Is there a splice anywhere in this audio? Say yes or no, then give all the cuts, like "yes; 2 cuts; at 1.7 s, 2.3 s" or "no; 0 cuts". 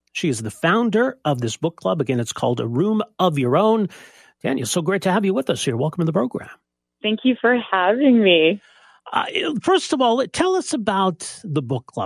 no; 0 cuts